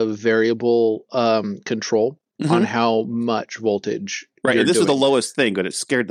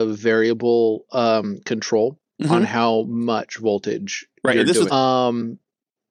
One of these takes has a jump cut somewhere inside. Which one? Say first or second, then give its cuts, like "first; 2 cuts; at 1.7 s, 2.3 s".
second; 1 cut; at 4.9 s